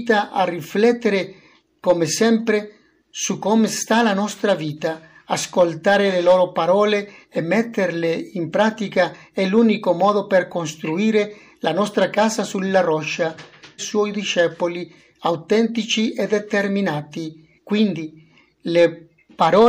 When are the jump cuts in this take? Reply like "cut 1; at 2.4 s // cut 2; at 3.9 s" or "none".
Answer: cut 1; at 13.8 s // cut 2; at 17.6 s